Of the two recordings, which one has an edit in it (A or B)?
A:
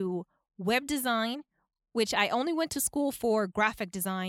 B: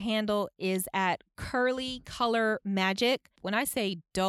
B